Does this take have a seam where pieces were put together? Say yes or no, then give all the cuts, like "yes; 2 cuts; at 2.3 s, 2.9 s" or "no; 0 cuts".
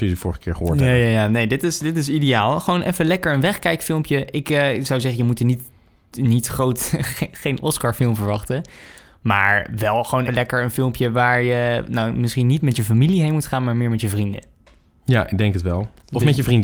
yes; 1 cut; at 10.3 s